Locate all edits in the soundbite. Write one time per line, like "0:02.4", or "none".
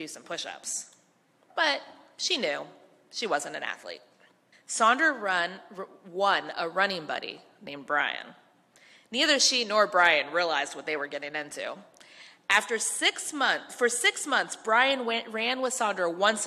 0:04.5